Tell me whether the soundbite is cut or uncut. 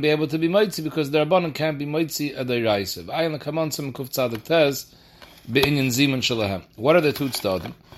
uncut